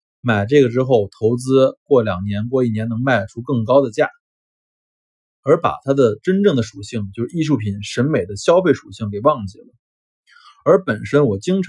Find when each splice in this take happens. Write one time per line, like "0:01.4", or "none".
none

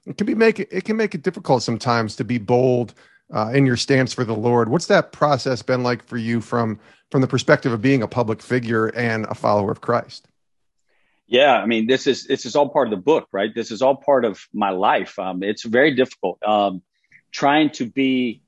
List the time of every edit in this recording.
none

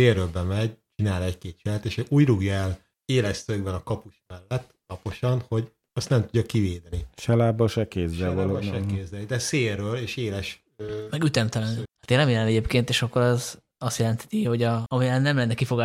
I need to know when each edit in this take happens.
0:11.9
0:14.9

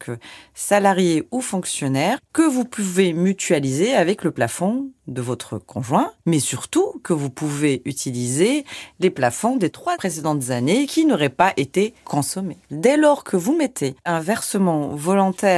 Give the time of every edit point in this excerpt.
0:12.7

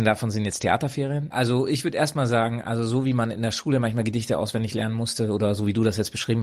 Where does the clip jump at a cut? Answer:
0:01.3

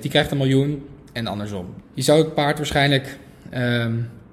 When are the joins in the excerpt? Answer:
0:01.8

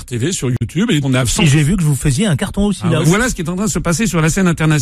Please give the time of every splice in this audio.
0:01.0
0:03.0

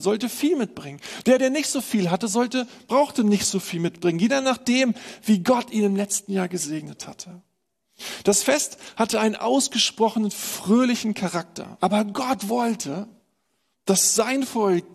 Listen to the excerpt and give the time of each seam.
0:11.8

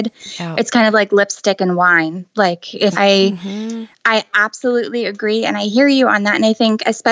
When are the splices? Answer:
0:02.9

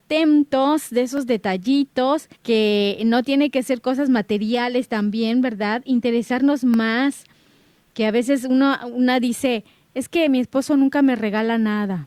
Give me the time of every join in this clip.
0:02.3

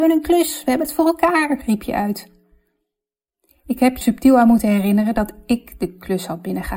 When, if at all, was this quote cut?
0:04.0

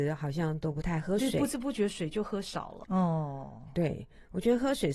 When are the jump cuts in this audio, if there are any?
0:02.8

